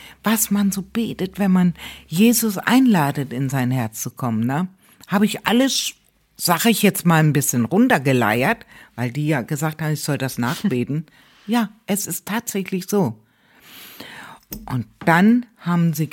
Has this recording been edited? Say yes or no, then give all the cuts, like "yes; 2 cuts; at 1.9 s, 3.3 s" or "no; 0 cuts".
no; 0 cuts